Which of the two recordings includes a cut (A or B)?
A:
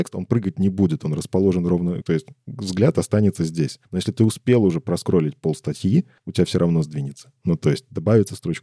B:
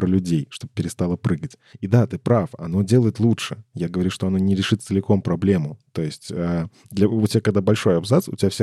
A